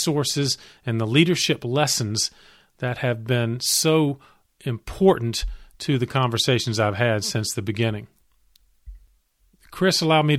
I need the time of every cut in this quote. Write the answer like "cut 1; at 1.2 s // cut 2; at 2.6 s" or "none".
none